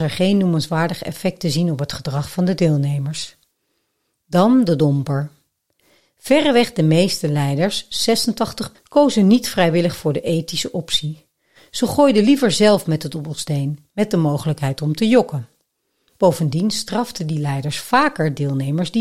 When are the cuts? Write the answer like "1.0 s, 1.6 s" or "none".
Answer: 8.7 s